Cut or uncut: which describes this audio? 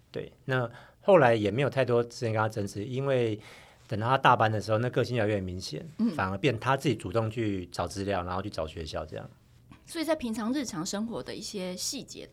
uncut